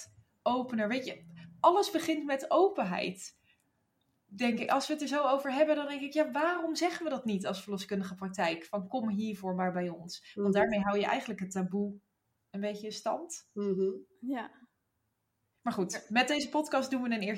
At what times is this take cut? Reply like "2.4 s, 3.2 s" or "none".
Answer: none